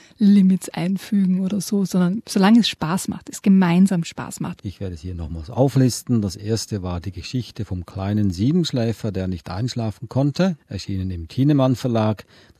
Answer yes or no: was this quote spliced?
yes